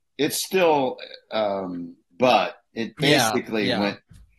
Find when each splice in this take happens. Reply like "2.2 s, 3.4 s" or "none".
2.1 s